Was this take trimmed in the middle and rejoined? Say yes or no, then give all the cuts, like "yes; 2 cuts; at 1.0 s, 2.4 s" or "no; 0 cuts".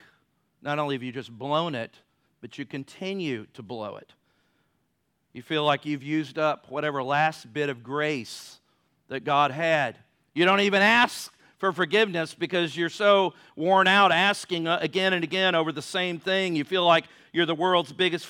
no; 0 cuts